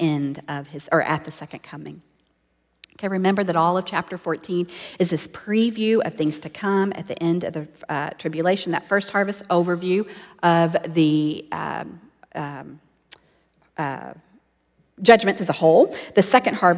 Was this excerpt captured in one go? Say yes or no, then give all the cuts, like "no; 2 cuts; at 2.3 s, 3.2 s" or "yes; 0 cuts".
yes; 0 cuts